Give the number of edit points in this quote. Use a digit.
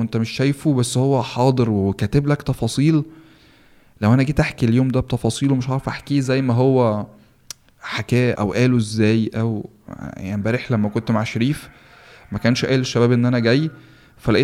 1